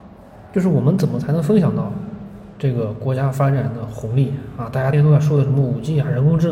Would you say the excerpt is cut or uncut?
cut